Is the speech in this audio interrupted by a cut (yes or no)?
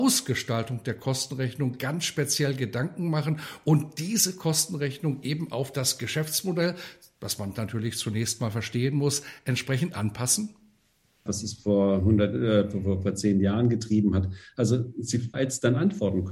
yes